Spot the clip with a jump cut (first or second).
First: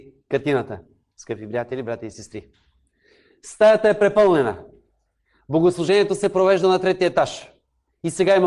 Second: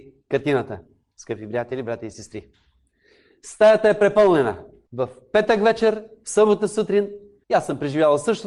second